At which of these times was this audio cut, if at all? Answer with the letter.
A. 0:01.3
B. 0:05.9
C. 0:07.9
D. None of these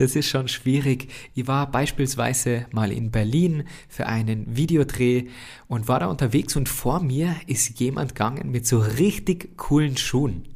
A